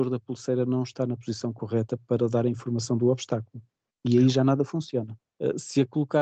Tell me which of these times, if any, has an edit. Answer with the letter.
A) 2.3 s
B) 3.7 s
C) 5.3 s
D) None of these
C